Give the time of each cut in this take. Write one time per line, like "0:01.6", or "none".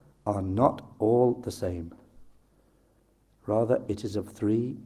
none